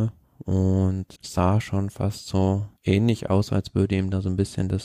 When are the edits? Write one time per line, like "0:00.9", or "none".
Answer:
0:01.2
0:02.8

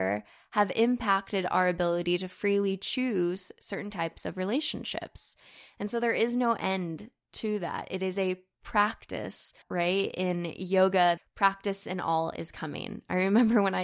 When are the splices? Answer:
0:09.6
0:11.2

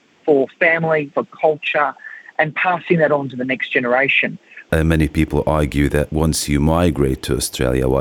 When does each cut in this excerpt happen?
0:01.1
0:04.7

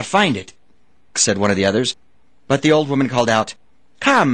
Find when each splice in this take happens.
0:01.1

